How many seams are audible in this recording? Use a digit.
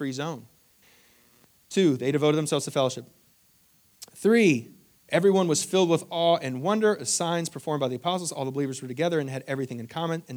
1